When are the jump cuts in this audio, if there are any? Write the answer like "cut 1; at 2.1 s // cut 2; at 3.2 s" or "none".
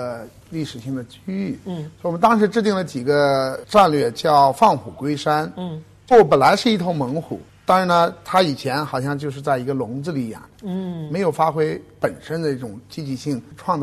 cut 1; at 6.1 s